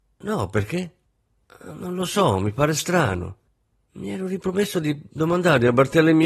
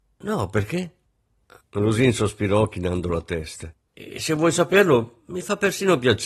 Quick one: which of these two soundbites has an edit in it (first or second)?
second